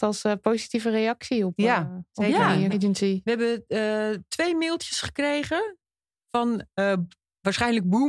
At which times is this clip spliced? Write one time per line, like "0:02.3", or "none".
0:02.7